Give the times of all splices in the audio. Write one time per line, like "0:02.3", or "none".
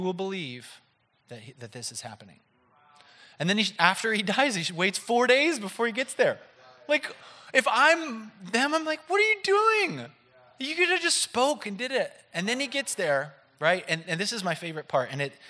0:03.8